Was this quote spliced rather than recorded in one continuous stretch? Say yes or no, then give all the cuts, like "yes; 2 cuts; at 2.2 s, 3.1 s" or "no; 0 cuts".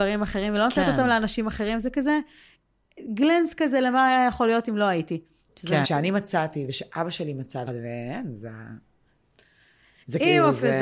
yes; 2 cuts; at 5.8 s, 7.7 s